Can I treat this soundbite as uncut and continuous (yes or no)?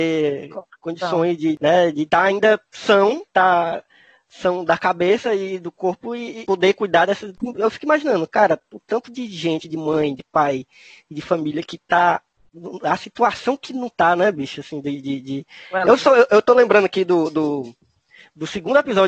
yes